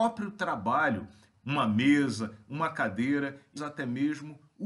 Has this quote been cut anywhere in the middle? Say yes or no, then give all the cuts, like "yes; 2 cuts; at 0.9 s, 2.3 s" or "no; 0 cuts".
yes; 2 cuts; at 1.3 s, 3.6 s